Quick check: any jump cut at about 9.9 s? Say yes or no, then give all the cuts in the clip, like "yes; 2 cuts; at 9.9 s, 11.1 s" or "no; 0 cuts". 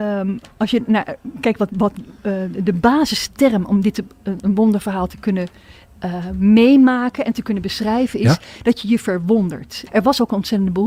yes; 2 cuts; at 2.2 s, 9.9 s